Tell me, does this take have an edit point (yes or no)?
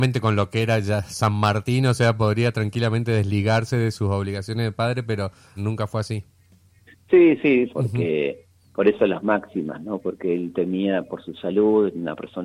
yes